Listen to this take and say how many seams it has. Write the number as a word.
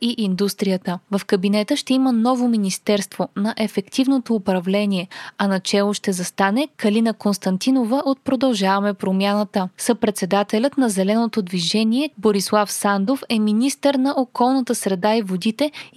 one